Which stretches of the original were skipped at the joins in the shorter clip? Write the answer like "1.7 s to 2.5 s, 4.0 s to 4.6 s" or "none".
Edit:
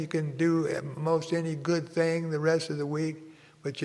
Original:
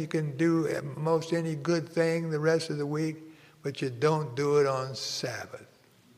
none